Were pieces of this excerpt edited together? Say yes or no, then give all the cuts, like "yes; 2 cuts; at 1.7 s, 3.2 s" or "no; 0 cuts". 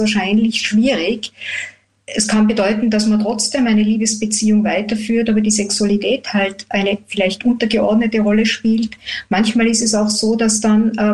no; 0 cuts